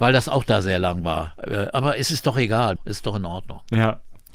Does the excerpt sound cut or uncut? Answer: cut